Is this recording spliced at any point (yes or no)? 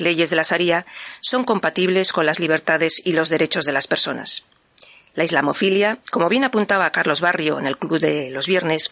no